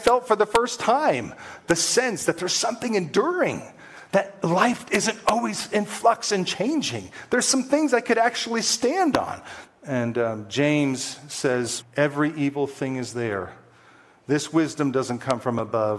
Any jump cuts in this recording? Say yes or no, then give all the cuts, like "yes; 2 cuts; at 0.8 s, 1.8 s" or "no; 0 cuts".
yes; 3 cuts; at 4.1 s, 9.7 s, 11.8 s